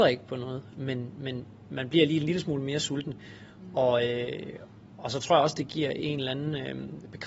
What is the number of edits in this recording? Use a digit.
0